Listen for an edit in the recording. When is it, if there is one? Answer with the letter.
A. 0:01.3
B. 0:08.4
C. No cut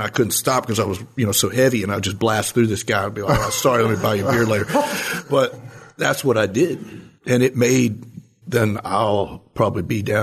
B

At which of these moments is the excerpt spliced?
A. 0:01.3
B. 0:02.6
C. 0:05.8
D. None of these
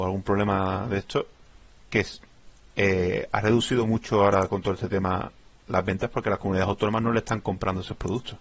D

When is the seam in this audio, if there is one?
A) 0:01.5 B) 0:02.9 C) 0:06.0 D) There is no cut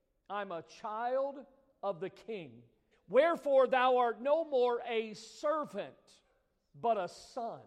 B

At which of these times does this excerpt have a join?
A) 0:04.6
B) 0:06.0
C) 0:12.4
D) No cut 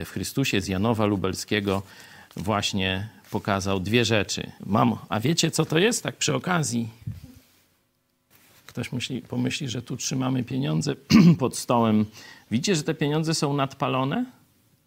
A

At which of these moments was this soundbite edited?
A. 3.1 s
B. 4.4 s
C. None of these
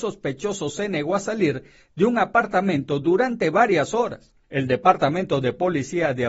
B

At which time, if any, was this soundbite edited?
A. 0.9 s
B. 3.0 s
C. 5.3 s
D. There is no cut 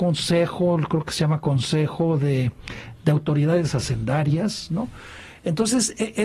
D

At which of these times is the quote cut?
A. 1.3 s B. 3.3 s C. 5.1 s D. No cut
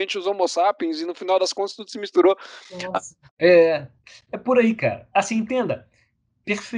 B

